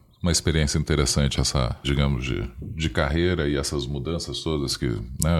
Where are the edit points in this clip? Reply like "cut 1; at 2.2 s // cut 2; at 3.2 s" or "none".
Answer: cut 1; at 1.8 s

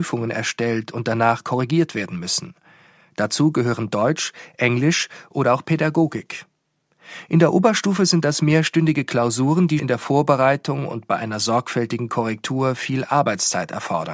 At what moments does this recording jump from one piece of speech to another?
cut 1; at 9.8 s

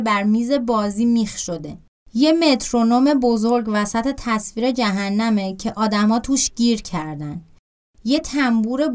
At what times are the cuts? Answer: cut 1; at 2.0 s

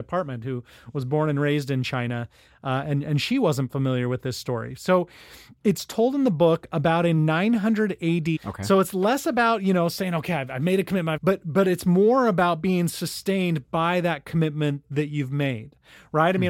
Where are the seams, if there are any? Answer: cut 1; at 8.4 s // cut 2; at 11.2 s // cut 3; at 14.8 s

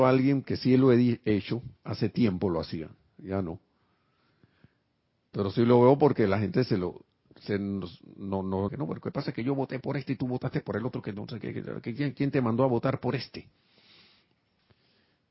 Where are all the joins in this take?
cut 1; at 8.7 s

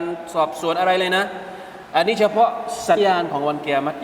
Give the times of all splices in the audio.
cut 1; at 3.0 s

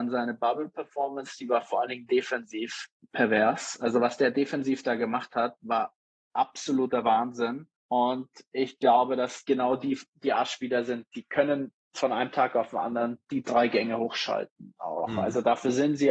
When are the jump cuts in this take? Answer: none

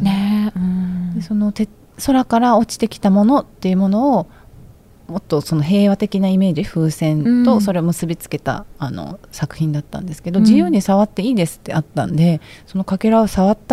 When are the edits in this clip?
none

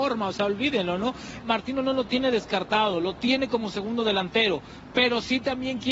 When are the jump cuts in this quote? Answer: cut 1; at 1.4 s

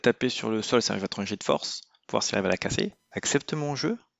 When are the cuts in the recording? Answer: cut 1; at 3.1 s

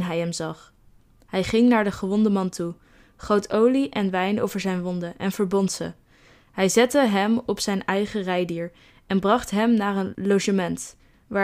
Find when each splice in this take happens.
none

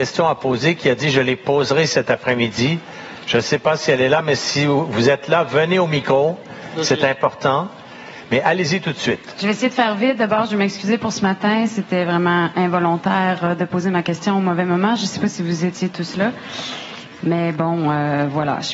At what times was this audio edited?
none

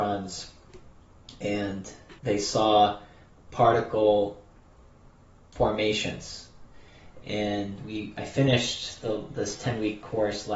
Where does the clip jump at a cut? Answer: cut 1; at 2.2 s // cut 2; at 7.2 s

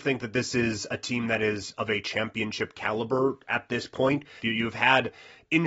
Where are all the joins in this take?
cut 1; at 4.4 s

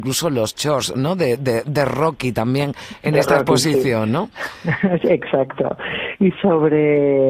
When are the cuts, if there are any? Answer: cut 1; at 6.3 s

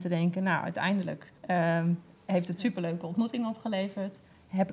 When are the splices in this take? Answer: cut 1; at 1.4 s

